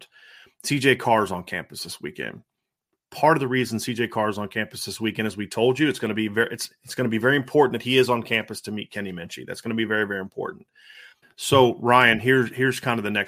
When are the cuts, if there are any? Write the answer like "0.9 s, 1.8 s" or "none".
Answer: 11.2 s